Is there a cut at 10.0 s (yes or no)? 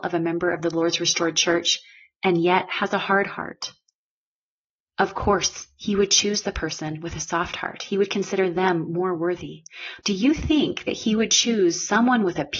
yes